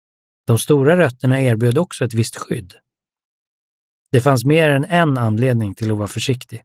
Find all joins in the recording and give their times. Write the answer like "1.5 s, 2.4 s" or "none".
none

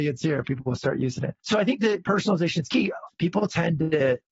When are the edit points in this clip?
1.4 s, 3.1 s

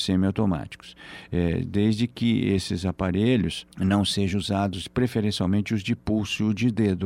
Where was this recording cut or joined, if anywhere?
3.7 s

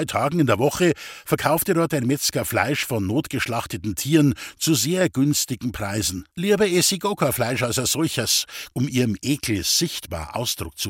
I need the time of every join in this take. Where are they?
6.3 s, 8.7 s

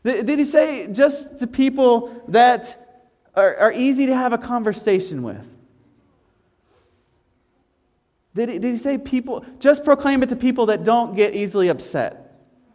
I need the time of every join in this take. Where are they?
none

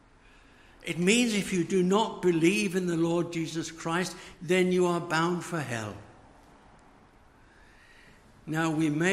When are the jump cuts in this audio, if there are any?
4.3 s

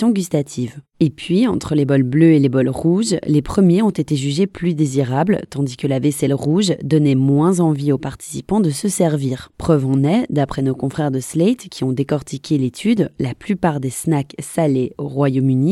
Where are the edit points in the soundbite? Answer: none

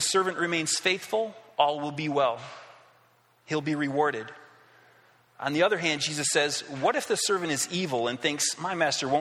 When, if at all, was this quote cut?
none

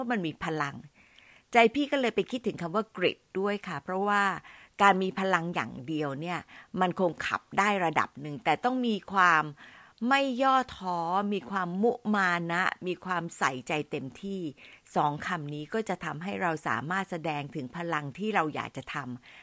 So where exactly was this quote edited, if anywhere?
none

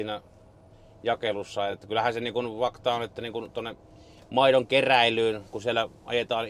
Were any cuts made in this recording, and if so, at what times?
none

